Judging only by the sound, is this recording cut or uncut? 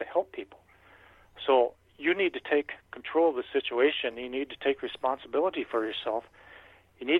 uncut